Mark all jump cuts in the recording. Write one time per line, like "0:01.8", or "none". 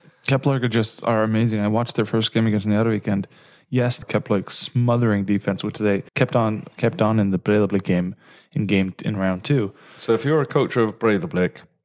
0:04.0
0:06.1

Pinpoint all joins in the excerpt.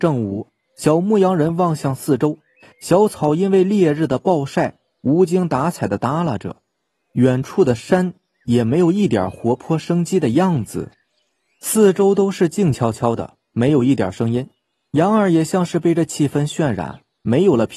none

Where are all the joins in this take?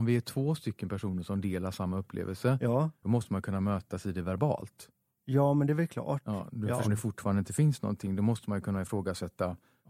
0:03.0
0:06.8

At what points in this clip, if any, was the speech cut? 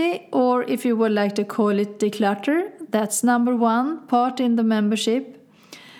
none

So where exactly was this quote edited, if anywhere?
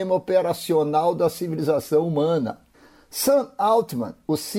none

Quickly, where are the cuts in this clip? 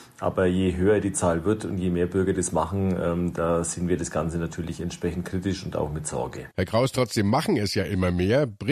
0:06.5

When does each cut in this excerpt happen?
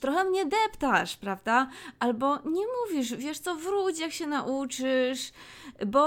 none

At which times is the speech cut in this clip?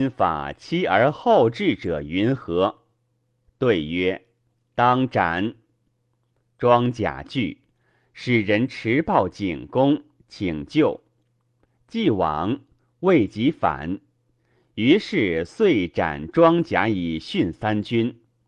none

